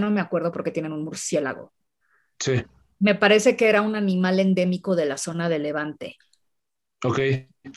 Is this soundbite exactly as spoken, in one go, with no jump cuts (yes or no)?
yes